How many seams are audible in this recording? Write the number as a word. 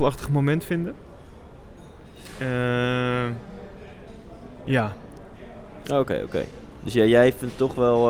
one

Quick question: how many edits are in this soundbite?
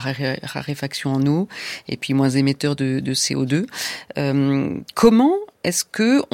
zero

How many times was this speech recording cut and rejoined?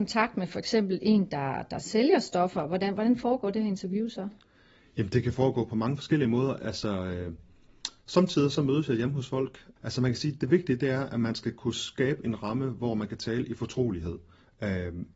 one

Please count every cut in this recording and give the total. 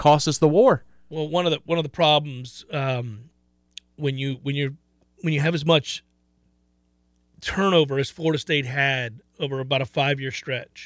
zero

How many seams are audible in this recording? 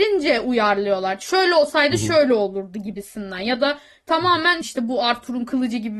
one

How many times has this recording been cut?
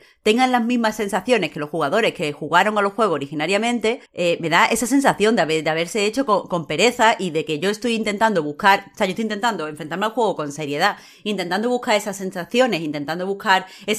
one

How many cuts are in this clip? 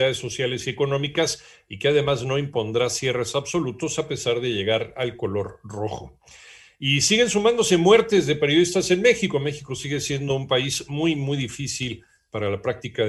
zero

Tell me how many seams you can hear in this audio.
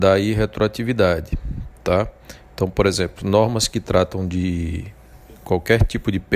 zero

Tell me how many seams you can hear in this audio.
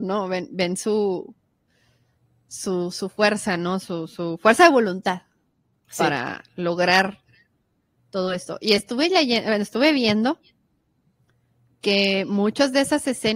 zero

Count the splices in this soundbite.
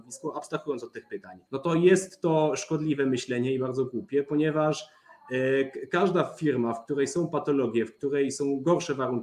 one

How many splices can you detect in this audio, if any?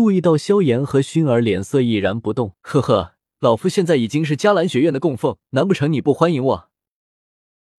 two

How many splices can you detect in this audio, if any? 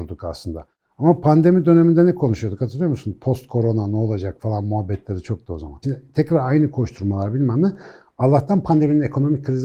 one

